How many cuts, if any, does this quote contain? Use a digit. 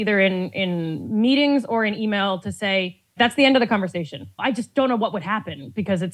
2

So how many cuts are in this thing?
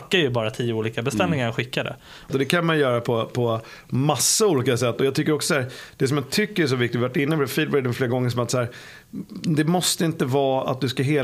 1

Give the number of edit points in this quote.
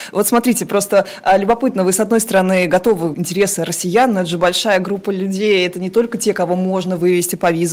1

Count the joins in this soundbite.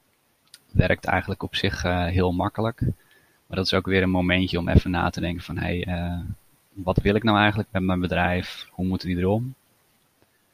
0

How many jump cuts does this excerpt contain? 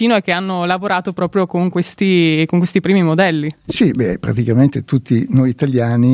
0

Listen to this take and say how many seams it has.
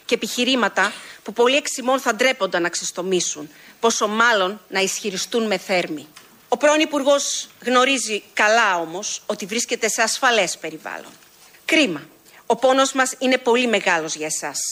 1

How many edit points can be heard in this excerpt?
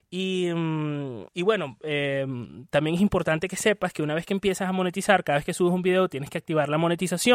1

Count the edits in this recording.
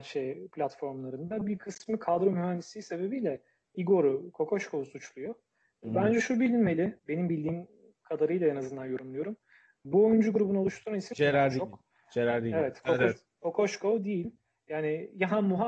1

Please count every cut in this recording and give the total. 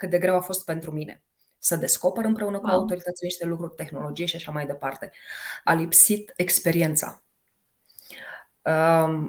1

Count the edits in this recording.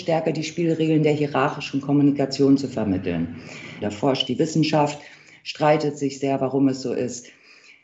1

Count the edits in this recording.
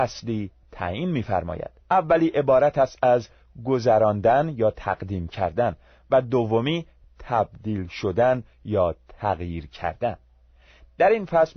1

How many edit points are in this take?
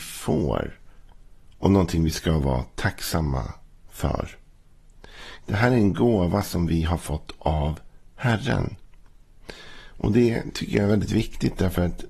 1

